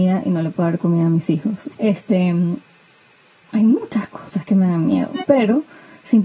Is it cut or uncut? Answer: cut